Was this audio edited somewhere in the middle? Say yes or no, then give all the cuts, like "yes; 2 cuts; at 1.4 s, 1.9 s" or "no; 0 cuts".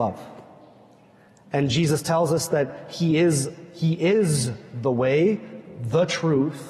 no; 0 cuts